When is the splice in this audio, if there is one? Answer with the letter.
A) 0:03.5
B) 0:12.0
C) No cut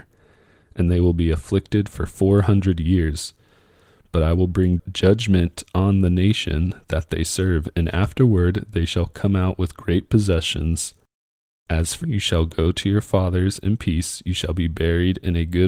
B